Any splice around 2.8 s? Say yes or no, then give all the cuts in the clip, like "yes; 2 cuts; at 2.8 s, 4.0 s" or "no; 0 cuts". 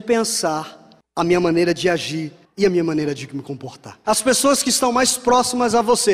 no; 1 cut; at 4.0 s